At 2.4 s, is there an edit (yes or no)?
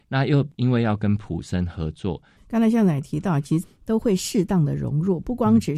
yes